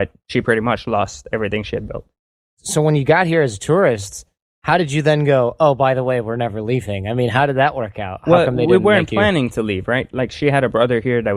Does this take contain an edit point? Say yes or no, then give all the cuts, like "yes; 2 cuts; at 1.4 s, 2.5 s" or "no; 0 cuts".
no; 0 cuts